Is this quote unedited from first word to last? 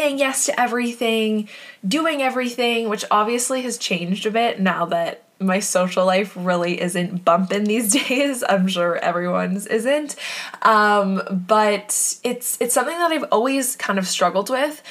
yes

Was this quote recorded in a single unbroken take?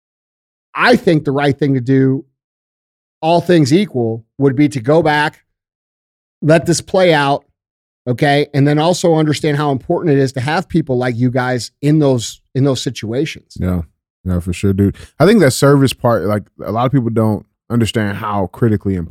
yes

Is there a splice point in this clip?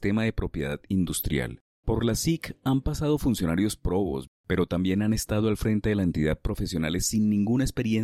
yes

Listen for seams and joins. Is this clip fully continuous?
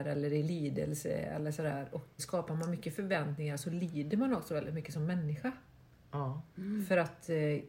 no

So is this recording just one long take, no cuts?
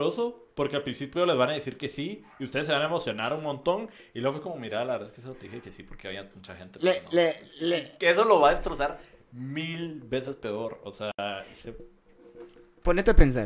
yes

